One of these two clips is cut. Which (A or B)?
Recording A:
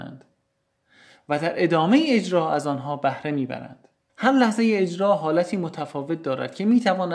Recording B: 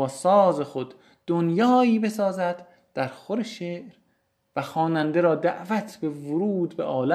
A